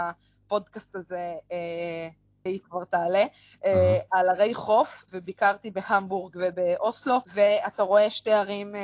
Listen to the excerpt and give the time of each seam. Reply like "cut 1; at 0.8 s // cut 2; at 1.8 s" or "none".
cut 1; at 2.5 s // cut 2; at 5.1 s // cut 3; at 7.2 s